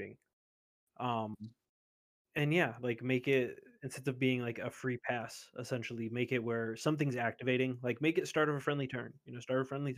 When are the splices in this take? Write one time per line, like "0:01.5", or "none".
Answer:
none